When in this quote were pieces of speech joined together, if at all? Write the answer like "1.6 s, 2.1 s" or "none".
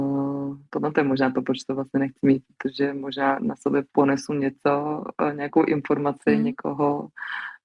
3.9 s